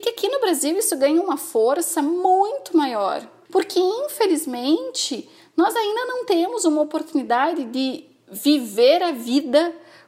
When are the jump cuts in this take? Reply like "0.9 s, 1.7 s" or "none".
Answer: none